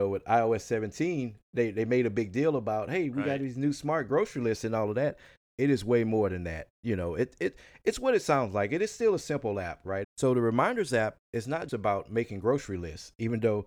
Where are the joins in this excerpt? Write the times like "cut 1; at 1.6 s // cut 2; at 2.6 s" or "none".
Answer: cut 1; at 10.0 s // cut 2; at 11.7 s

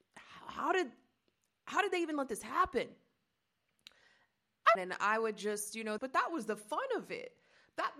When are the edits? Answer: cut 1; at 4.8 s // cut 2; at 6.0 s

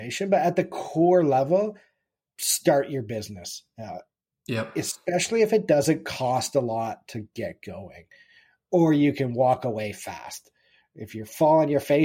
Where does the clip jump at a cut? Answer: none

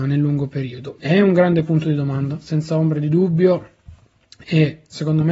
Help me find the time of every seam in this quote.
cut 1; at 1.0 s

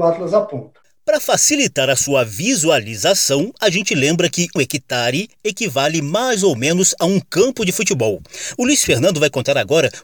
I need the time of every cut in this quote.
cut 1; at 4.6 s

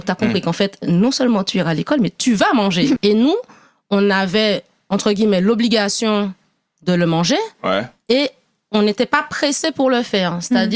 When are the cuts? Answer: cut 1; at 3.0 s

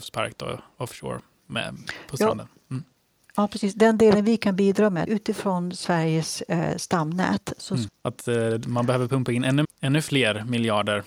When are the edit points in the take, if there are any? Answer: cut 1; at 5.1 s // cut 2; at 7.9 s // cut 3; at 9.6 s

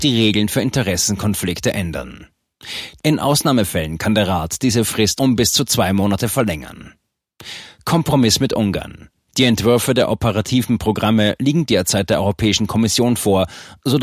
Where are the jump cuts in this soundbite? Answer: cut 1; at 3.0 s

